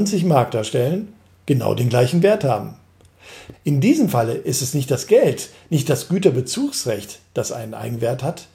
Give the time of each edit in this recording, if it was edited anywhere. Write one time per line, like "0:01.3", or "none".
0:03.5